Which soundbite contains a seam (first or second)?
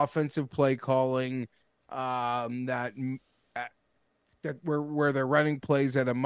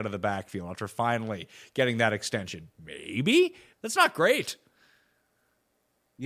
second